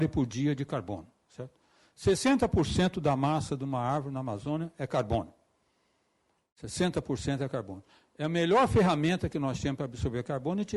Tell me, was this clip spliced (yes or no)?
no